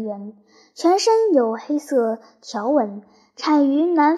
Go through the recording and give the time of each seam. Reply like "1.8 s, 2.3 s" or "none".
none